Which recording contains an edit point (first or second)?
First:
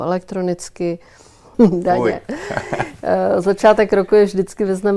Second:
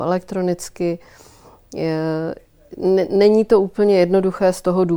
first